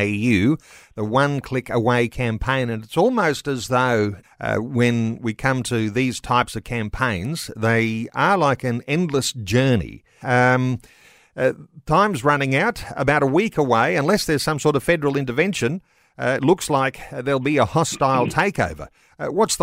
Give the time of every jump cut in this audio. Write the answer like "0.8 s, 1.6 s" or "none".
4.2 s, 10.2 s